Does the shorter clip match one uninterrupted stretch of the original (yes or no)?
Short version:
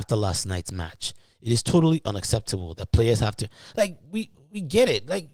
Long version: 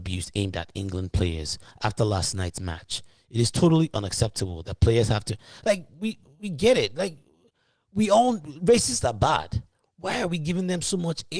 yes